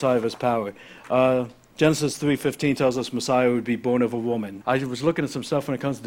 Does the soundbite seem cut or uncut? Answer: cut